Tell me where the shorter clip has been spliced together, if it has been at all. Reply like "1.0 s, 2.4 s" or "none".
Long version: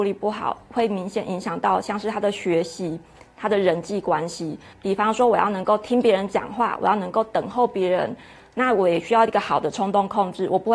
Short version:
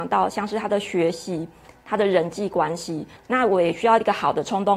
3.2 s